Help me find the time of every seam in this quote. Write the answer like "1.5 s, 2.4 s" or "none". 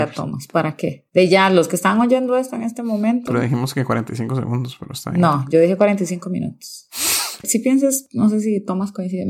7.4 s